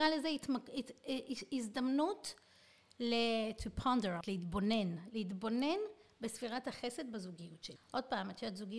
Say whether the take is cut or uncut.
cut